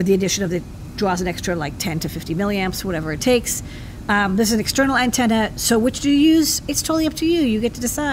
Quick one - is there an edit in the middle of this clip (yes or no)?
no